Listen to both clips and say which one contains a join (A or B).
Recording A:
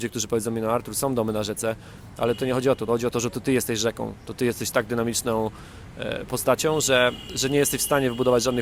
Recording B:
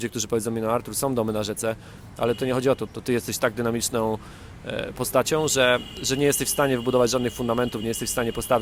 B